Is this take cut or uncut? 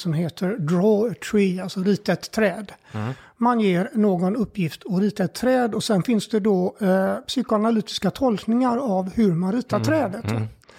uncut